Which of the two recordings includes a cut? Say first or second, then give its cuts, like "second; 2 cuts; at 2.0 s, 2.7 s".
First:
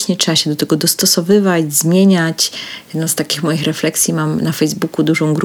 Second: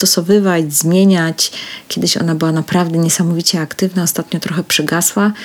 second; 1 cut; at 1.8 s